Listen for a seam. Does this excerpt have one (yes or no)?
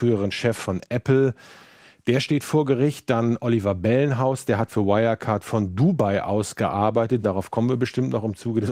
yes